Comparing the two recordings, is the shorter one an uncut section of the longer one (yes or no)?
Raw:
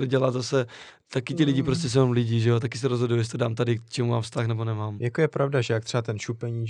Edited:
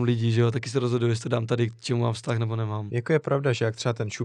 yes